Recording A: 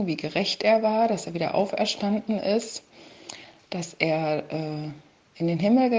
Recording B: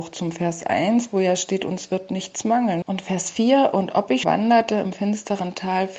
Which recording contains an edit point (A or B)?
B